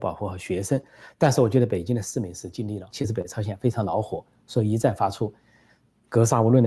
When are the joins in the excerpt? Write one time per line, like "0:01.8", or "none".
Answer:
0:02.9